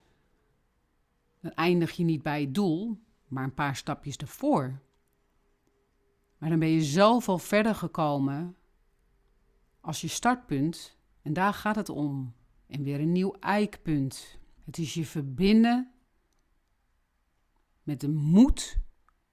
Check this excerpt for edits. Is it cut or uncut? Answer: cut